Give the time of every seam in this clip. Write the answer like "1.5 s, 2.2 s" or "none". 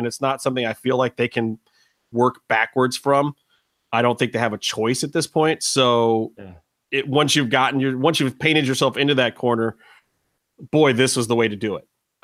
none